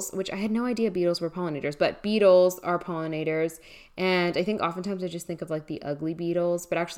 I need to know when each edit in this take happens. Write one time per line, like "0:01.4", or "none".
none